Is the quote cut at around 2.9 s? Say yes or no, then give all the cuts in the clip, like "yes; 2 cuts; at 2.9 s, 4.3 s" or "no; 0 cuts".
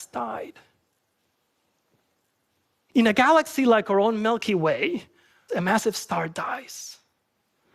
no; 1 cut; at 5.5 s